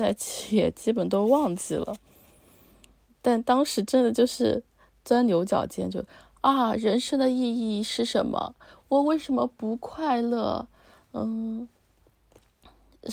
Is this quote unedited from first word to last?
yes; 0 cuts

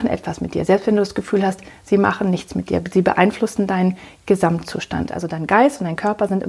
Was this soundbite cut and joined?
yes; 1 cut; at 5.1 s

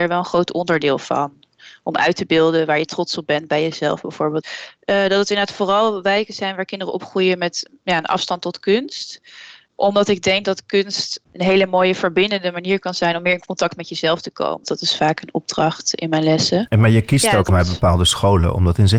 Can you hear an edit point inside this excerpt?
yes; 3 cuts; at 4.4 s, 14.6 s, 17.5 s

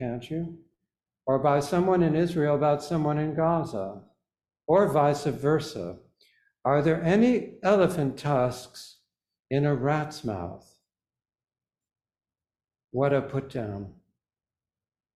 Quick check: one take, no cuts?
yes; 0 cuts

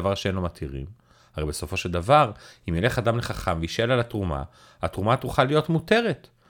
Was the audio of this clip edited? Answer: no; 0 cuts

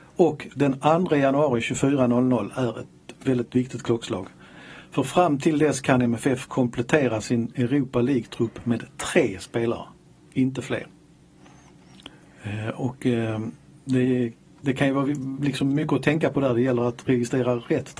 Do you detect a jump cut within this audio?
no; 0 cuts

